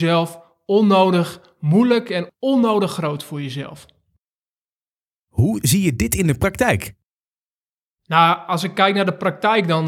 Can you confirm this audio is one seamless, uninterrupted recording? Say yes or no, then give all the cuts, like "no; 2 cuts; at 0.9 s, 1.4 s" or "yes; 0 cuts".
yes; 0 cuts